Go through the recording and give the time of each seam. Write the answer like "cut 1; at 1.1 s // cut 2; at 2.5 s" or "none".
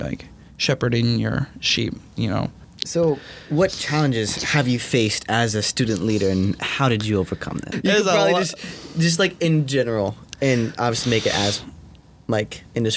cut 1; at 2.6 s // cut 2; at 7.7 s